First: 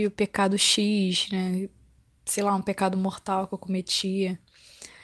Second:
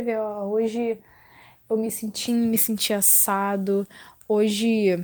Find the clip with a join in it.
second; 1 cut; at 2.3 s

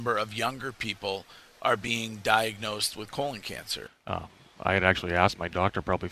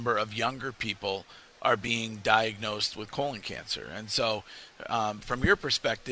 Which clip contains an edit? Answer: first; 1 cut; at 3.9 s

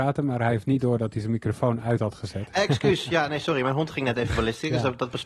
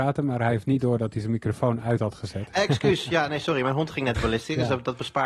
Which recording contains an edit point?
second; 1 cut; at 4.1 s

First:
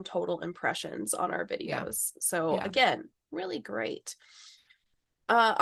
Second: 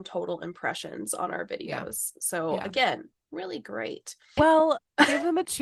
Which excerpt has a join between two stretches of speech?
second; 1 cut; at 4.4 s

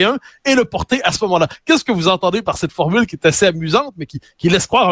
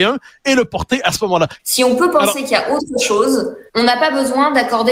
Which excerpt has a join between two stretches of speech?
second; 2 cuts; at 1.6 s, 3.7 s

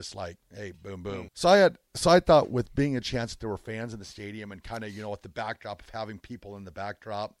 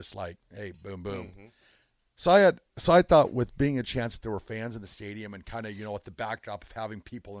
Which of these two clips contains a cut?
first; 1 cut; at 1.3 s

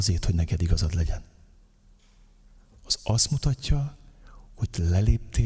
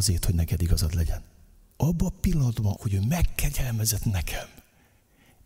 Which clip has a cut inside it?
second; 2 cuts; at 1.7 s, 2.8 s

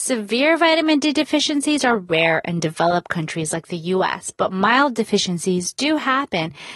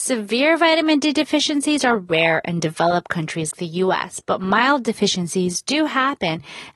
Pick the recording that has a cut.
second; 1 cut; at 3.5 s

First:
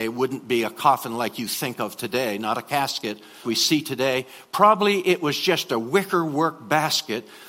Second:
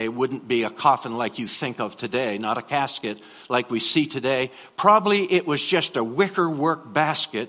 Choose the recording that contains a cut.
first; 1 cut; at 3.4 s

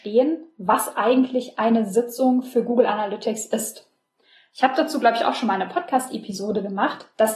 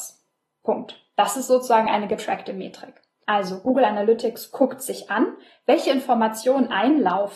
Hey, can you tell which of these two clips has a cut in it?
second; 1 cut; at 3.2 s

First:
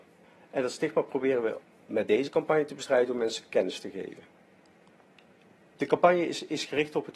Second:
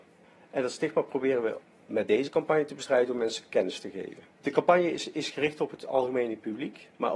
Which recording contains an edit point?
second; 1 cut; at 4.3 s

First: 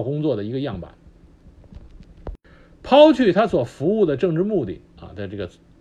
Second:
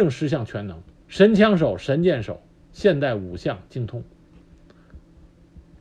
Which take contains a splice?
second; 2 cuts; at 1.0 s, 2.6 s

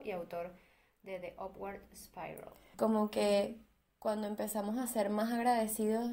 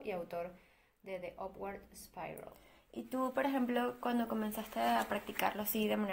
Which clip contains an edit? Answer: first; 1 cut; at 2.7 s

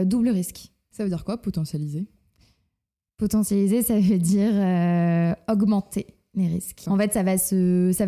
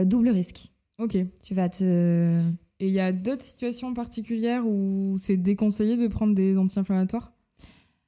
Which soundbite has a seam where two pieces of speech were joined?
first; 2 cuts; at 0.9 s, 6.9 s

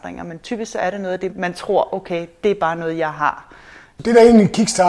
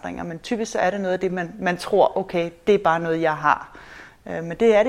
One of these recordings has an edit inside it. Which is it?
first; 2 cuts; at 1.3 s, 4.0 s

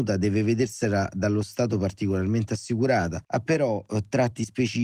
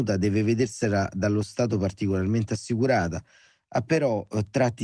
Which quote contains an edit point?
first; 1 cut; at 3.2 s

